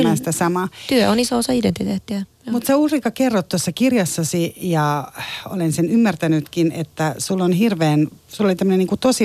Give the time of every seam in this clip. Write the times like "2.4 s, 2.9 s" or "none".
none